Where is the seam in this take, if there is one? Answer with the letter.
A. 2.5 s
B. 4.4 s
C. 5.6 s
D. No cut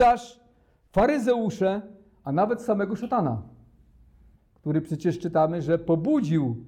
B